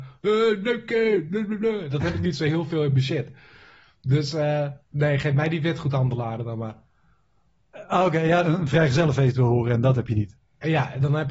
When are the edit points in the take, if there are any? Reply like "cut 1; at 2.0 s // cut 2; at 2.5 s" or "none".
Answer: cut 1; at 4.8 s // cut 2; at 8.4 s